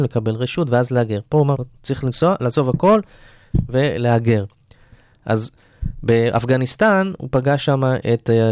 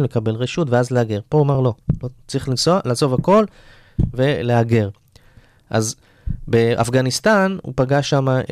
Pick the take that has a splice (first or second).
first